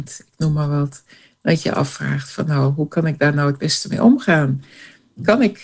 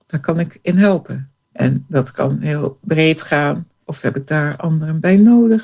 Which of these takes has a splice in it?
second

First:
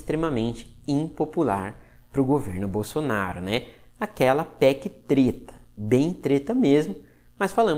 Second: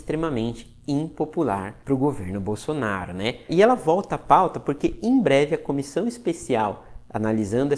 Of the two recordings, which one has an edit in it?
second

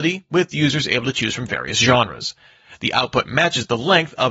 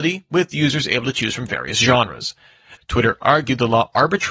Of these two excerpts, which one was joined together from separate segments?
second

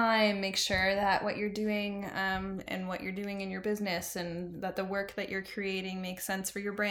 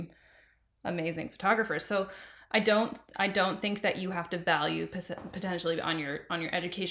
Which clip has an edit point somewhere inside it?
first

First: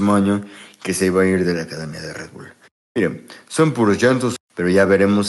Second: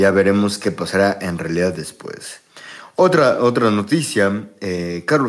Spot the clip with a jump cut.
first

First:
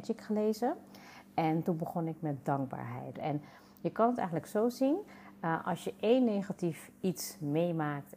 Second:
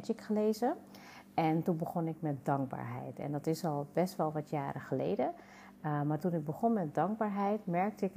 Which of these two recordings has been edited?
first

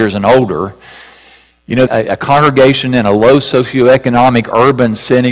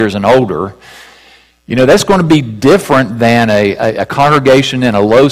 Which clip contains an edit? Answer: first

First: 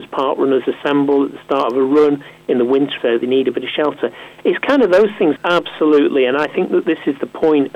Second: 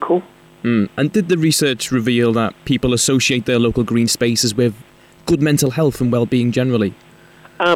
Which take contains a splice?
first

